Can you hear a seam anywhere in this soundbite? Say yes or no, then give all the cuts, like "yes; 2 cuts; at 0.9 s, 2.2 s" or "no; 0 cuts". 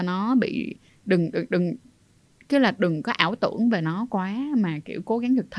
no; 0 cuts